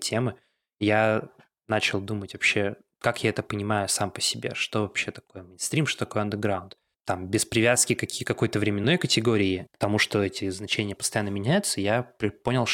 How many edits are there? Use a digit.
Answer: 0